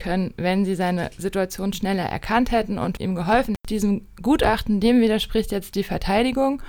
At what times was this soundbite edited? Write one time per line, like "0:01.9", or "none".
0:03.6

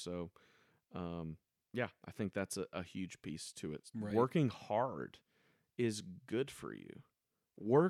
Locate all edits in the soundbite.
none

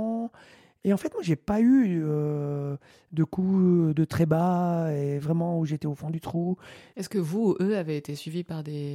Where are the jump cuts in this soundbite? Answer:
0:06.9

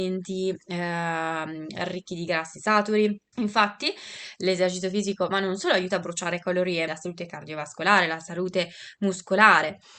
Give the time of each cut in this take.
0:03.3
0:06.9

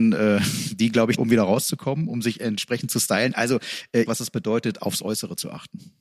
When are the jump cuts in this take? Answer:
0:01.2
0:04.0

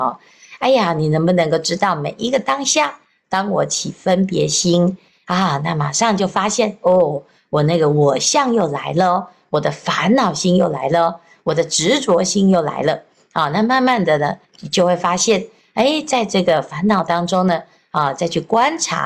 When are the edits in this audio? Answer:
none

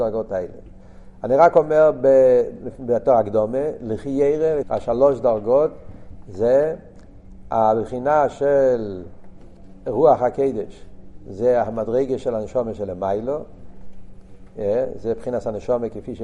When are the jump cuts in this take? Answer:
0:04.6

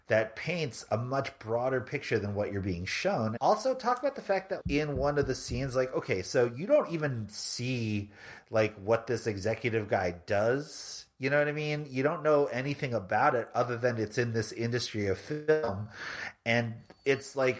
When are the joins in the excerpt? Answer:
0:03.4
0:04.6

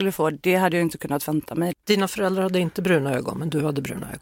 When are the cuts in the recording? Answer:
0:01.7

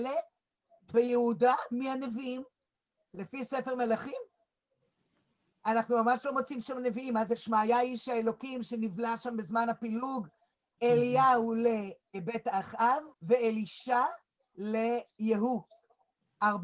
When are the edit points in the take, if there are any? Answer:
0:10.8
0:13.1

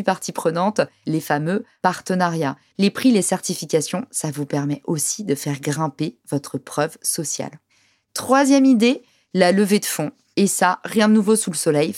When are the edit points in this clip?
0:02.7

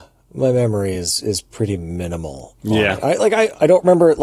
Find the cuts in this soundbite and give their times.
none

